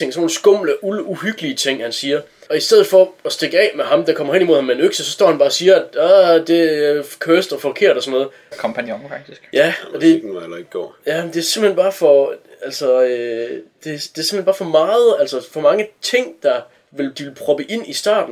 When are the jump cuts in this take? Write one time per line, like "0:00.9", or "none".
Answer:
0:08.5
0:17.1